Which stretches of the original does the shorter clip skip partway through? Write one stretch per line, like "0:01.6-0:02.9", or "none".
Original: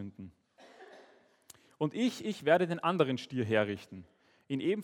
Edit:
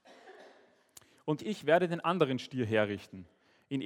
0:01.9-0:02.2